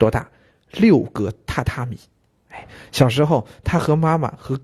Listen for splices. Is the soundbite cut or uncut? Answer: uncut